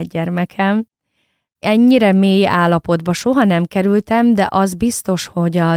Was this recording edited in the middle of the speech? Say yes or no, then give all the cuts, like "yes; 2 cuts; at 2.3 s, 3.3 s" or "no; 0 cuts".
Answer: no; 0 cuts